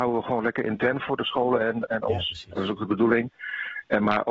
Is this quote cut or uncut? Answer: uncut